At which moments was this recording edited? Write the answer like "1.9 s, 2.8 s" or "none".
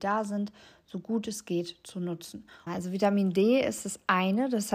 2.7 s